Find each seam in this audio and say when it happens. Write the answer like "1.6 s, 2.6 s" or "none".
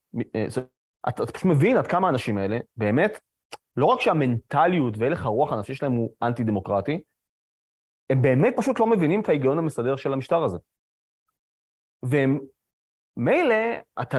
0.9 s